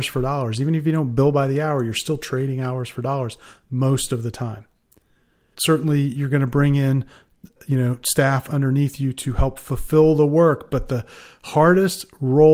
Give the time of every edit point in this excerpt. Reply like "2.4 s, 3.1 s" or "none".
5.5 s, 7.6 s